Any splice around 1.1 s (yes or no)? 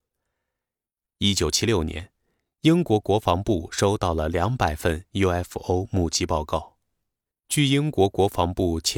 no